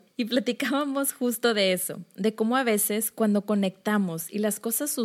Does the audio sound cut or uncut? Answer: uncut